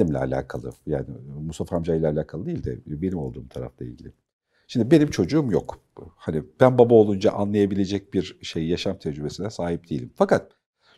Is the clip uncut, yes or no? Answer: yes